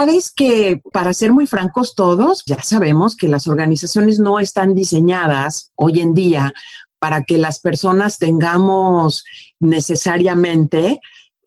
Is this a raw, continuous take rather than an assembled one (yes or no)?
no